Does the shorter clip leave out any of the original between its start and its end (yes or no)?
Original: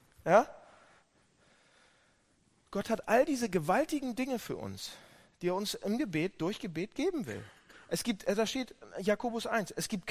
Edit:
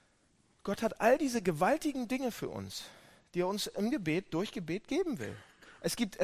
no